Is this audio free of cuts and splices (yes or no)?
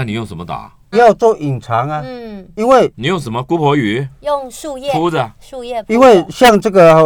no